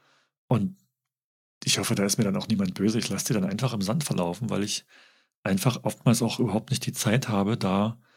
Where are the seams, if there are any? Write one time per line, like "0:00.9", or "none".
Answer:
none